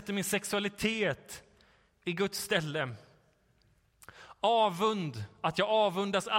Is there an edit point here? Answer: no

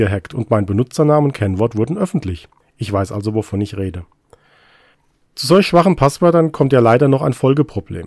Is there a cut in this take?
yes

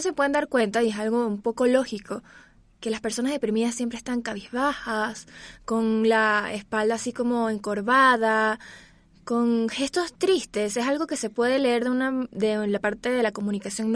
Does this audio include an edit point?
no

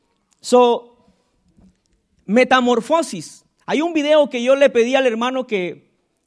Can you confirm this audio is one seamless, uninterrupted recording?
yes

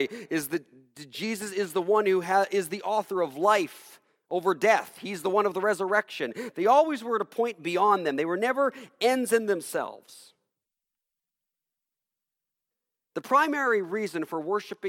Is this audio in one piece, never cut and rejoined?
yes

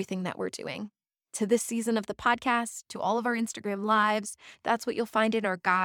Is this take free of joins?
yes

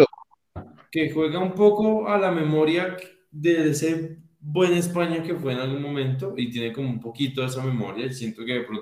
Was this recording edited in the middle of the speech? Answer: no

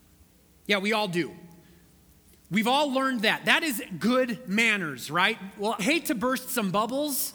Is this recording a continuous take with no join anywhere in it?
no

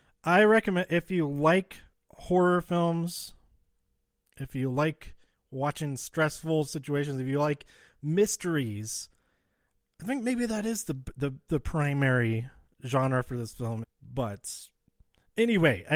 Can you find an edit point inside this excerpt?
yes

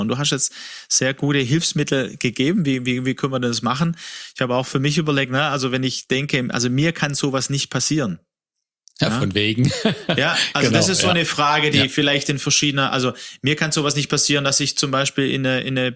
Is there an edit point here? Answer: no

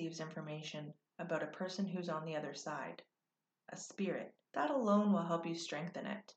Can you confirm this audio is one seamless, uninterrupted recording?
no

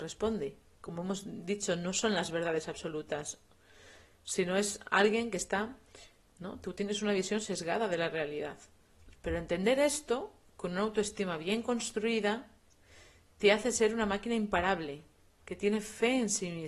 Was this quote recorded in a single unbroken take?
no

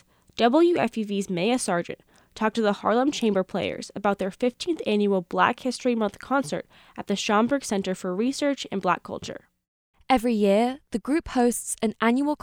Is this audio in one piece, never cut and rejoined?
no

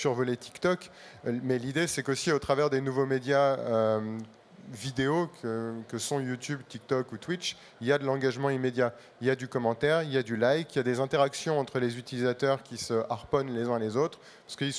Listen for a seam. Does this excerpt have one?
no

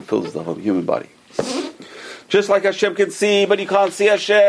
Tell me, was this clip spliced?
no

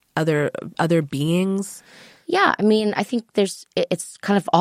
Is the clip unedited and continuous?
yes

